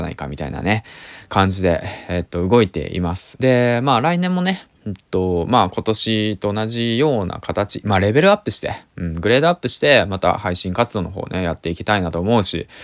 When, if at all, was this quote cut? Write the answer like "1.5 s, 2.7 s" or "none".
3.4 s, 4.7 s